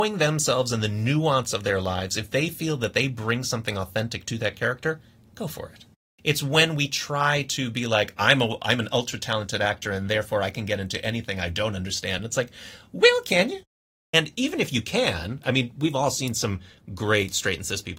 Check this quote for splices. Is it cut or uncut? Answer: uncut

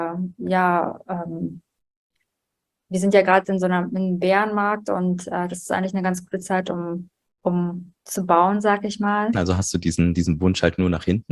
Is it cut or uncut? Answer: cut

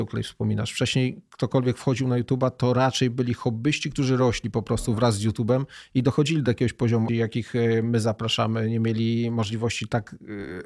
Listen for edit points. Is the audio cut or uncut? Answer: cut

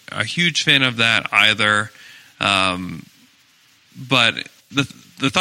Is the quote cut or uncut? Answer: uncut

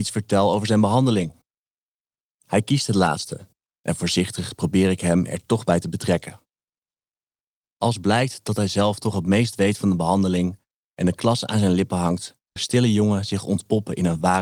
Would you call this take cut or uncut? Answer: cut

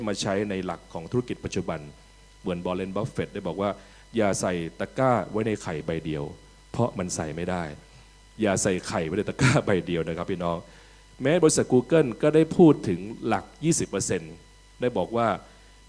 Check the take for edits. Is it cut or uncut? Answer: uncut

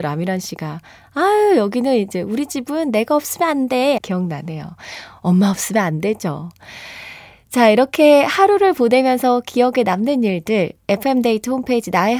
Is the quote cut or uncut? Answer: cut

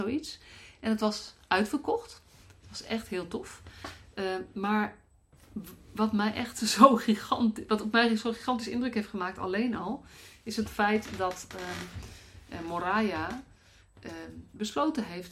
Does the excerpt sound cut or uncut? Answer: uncut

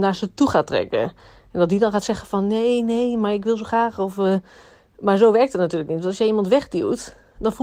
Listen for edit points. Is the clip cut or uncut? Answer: uncut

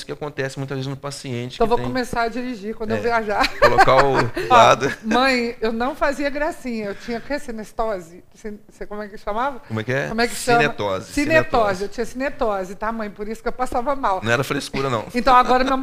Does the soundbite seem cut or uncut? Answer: cut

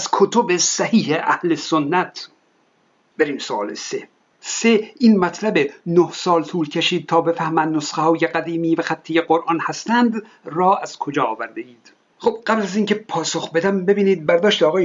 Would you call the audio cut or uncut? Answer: uncut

